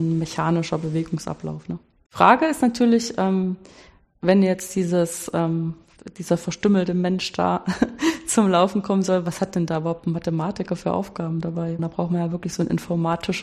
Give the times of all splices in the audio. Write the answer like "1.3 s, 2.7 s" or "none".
2.1 s, 11.8 s